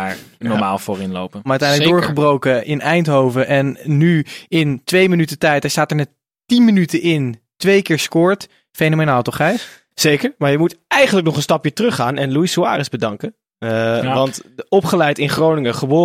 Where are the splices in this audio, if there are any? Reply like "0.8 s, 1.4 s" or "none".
1.5 s

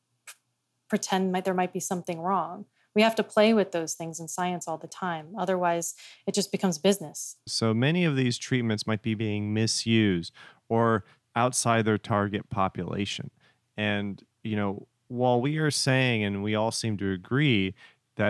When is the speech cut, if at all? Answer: 7.5 s

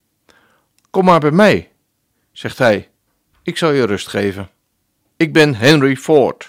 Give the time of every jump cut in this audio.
5.0 s

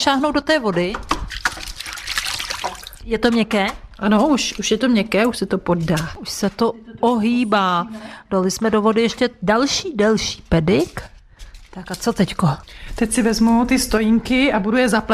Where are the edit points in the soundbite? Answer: none

